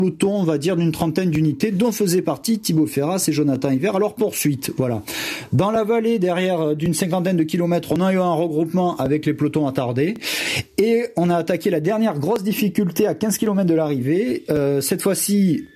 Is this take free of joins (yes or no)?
yes